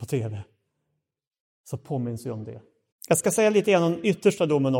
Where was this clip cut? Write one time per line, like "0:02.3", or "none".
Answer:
0:02.9